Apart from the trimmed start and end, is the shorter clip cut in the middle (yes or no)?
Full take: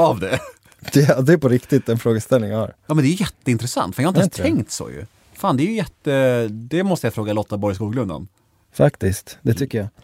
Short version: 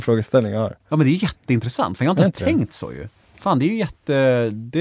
no